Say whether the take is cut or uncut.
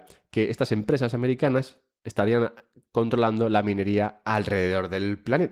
uncut